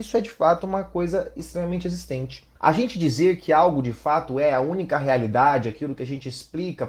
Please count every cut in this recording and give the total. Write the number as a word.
one